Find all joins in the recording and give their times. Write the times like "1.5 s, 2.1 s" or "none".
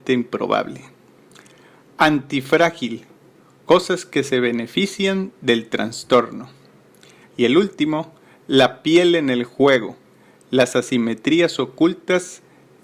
7.2 s